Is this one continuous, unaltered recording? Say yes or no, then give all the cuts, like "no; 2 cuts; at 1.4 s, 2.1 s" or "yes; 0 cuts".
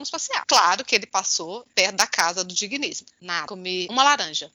no; 2 cuts; at 1.7 s, 3.1 s